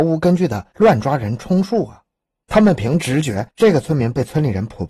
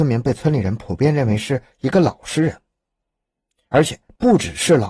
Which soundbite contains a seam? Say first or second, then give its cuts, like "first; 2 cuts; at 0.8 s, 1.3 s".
first; 2 cuts; at 2.4 s, 3.5 s